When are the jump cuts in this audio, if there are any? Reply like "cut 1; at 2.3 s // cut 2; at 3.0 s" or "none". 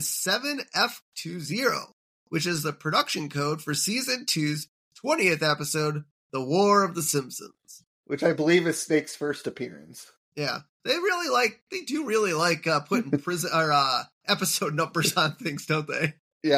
none